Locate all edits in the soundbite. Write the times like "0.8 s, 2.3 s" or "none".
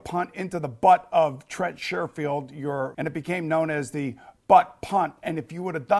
2.9 s